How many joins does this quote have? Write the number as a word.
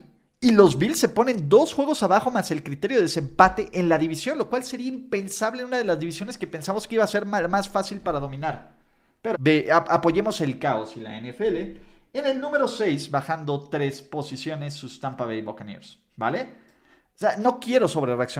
one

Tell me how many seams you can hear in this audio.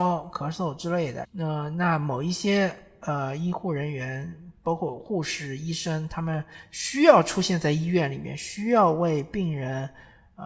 one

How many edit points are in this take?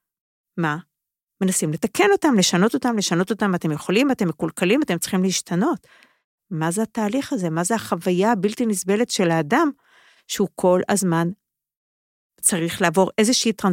zero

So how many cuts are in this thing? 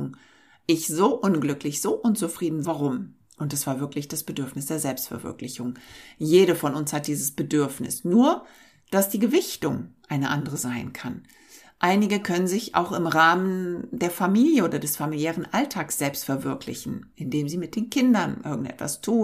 one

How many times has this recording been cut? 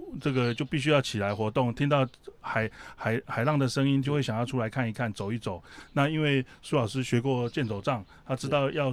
one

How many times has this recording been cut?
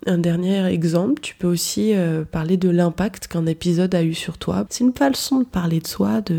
one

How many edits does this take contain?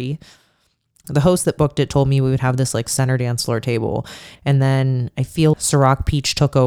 three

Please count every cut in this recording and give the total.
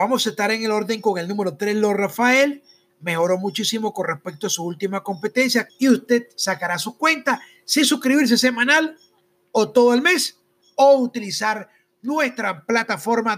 one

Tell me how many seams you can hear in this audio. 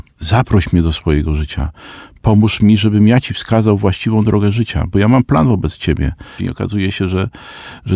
one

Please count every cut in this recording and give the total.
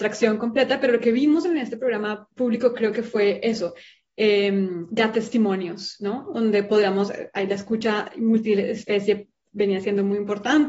one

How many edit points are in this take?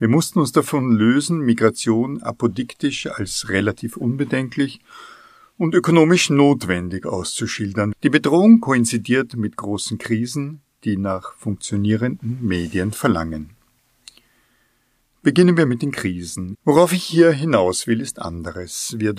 two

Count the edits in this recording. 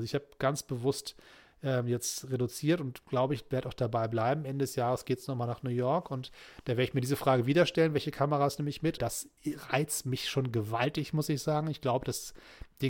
one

